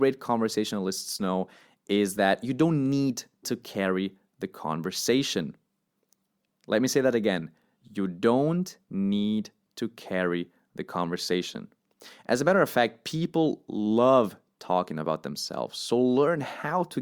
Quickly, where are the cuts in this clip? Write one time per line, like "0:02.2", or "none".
none